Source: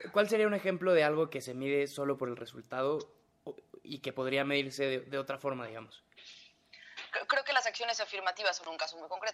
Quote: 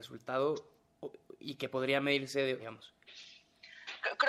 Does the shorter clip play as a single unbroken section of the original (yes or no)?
no